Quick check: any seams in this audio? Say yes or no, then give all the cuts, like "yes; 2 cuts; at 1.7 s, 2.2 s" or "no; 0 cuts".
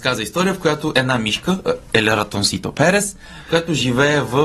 no; 0 cuts